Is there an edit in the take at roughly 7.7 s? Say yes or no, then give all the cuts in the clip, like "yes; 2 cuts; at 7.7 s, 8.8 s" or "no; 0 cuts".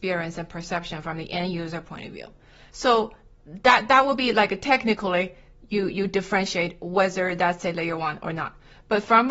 no; 1 cut; at 2.7 s